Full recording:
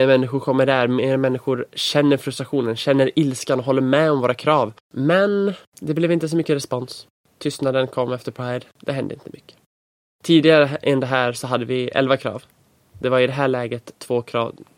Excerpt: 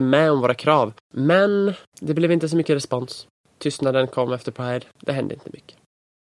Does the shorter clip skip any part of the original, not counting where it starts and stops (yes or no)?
no